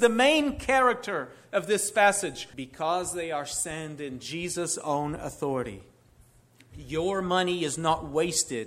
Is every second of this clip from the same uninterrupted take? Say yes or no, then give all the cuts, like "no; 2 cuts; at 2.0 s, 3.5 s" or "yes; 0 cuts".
no; 1 cut; at 2.5 s